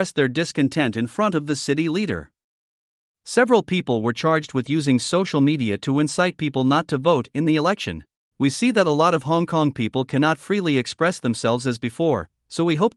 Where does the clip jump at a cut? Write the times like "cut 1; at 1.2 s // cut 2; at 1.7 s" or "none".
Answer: cut 1; at 8.3 s